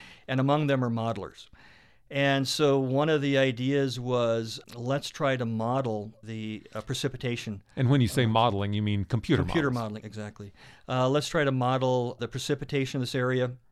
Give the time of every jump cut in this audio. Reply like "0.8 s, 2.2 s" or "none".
10.0 s